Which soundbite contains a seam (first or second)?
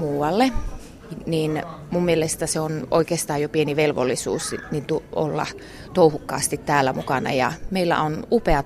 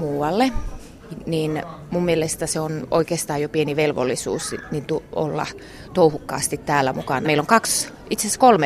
second